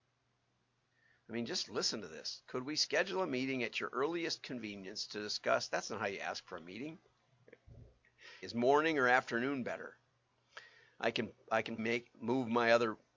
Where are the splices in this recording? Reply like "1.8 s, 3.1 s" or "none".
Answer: 8.4 s, 11.8 s